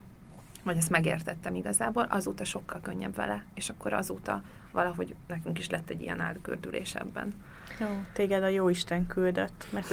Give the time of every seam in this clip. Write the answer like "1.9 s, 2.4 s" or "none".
none